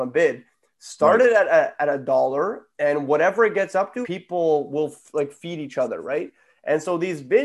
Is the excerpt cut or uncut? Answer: cut